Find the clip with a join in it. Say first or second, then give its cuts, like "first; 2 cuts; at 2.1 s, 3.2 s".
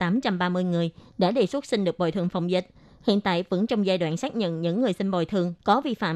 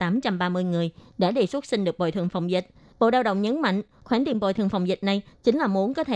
second; 1 cut; at 2.9 s